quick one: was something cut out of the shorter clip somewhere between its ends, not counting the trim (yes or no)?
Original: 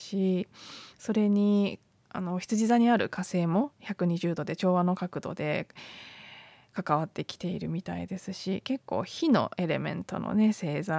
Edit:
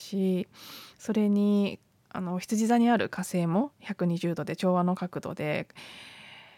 no